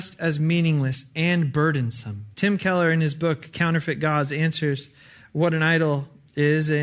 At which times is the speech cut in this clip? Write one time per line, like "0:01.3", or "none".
0:02.3